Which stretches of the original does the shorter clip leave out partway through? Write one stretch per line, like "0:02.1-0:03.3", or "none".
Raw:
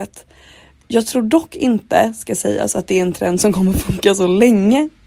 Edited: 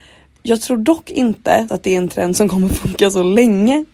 0:02.1-0:02.7